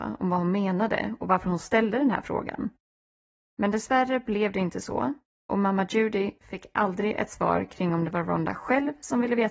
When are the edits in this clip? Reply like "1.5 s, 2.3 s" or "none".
none